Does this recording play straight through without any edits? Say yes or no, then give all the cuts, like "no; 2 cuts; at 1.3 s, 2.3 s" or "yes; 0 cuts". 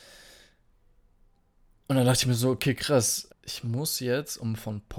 no; 1 cut; at 3.3 s